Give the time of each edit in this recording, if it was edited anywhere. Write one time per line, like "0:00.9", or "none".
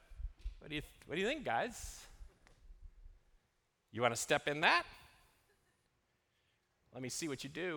none